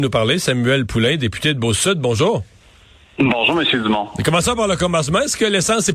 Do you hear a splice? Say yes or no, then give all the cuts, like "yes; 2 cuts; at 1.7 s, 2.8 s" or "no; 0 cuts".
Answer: no; 0 cuts